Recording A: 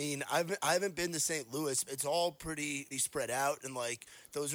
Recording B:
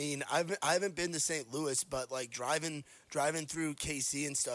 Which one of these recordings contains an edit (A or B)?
A